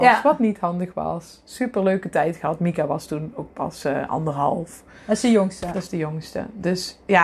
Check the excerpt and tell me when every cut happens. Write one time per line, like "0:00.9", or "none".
none